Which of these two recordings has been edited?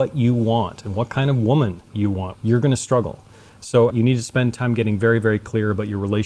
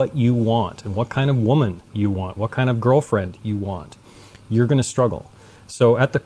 first; 2 cuts; at 2.3 s, 3.9 s

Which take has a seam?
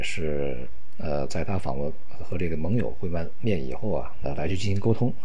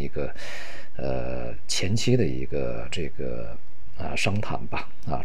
first; 1 cut; at 4.2 s

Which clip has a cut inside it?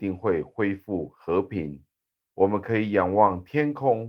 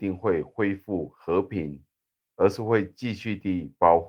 second; 1 cut; at 2.2 s

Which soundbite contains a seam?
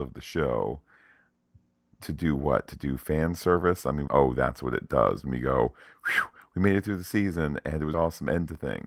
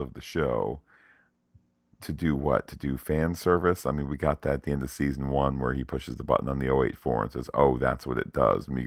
first; 2 cuts; at 4.1 s, 7.9 s

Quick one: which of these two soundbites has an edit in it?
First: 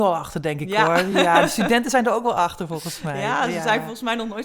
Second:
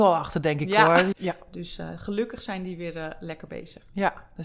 second; 1 cut; at 1.1 s

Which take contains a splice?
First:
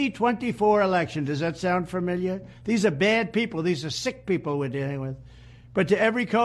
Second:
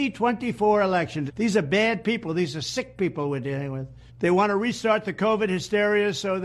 second; 2 cuts; at 1.3 s, 4.1 s

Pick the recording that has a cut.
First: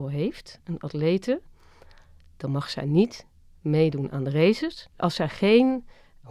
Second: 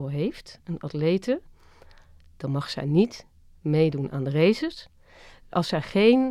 first; 1 cut; at 4.9 s

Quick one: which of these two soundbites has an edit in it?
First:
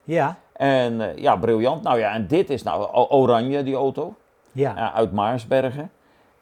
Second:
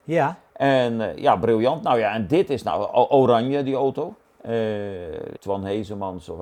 second; 2 cuts; at 4.2 s, 5.4 s

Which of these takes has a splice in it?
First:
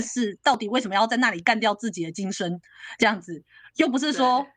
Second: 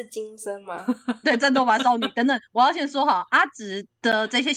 second; 1 cut; at 1.2 s

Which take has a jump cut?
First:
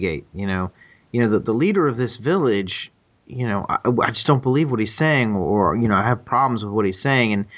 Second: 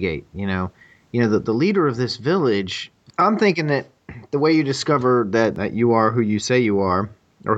second; 1 cut; at 3.1 s

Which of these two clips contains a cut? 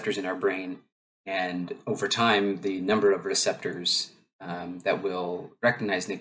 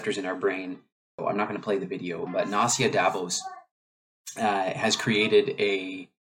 second; 2 cuts; at 1.2 s, 2.3 s

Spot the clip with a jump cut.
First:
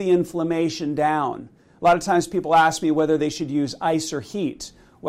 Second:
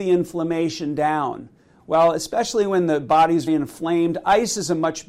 second; 2 cuts; at 1.8 s, 3.5 s

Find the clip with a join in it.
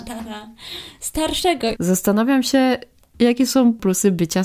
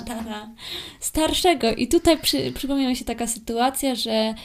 first; 1 cut; at 1.8 s

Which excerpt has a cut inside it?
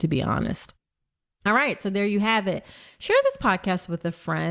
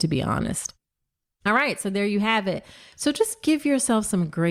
second; 1 cut; at 2.9 s

